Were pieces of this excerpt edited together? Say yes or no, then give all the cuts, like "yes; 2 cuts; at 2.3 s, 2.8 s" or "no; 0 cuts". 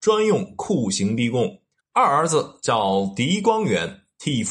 yes; 1 cut; at 1.8 s